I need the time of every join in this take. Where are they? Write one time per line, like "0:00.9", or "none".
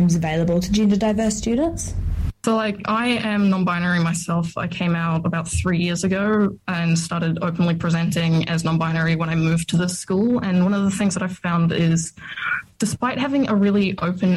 none